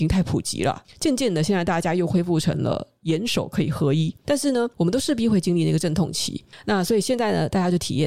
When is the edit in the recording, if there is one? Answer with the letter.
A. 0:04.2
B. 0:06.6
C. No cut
A